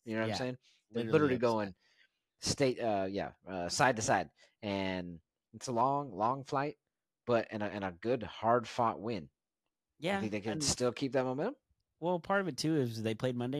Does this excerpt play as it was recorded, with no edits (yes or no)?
yes